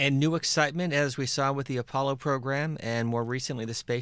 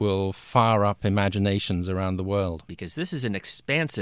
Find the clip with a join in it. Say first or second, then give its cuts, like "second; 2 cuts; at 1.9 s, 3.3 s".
second; 1 cut; at 2.7 s